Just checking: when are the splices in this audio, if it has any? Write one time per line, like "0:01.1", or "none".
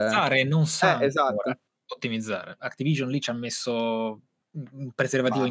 0:02.6